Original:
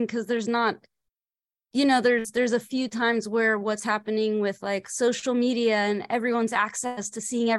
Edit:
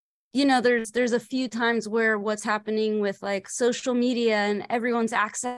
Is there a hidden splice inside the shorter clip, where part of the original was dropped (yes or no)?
no